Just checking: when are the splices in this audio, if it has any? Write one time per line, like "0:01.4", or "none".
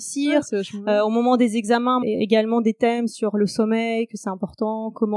0:02.0